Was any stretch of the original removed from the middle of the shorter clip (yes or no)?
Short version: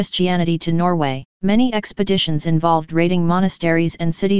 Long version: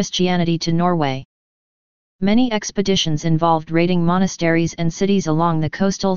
yes